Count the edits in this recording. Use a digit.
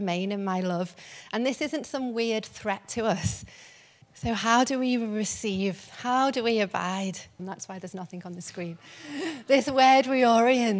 2